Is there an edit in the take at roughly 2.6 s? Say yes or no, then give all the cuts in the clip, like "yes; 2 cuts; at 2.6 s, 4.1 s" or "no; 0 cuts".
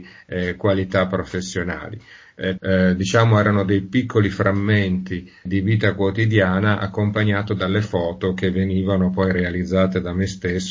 yes; 2 cuts; at 2.6 s, 5.5 s